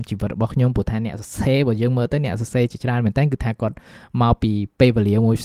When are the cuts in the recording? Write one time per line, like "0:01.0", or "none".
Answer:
none

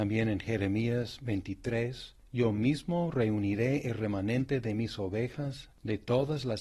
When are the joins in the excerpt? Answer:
0:02.2

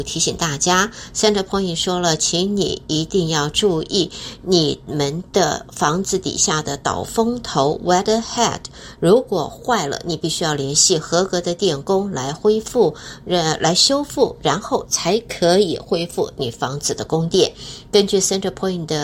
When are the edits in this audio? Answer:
none

